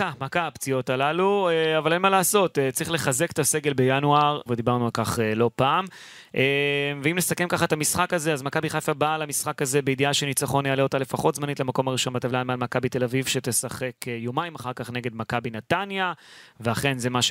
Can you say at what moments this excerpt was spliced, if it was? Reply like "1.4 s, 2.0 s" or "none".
4.5 s